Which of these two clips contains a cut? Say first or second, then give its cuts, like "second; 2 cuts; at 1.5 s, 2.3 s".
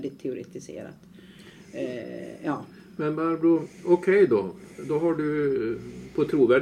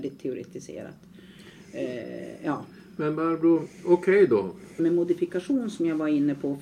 second; 1 cut; at 4.8 s